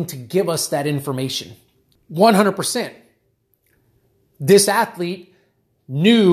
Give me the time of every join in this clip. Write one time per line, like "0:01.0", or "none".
0:01.9